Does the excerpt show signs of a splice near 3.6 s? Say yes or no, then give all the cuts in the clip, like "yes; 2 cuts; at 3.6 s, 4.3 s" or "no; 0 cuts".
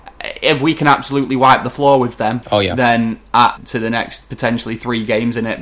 yes; 2 cuts; at 2.4 s, 3.6 s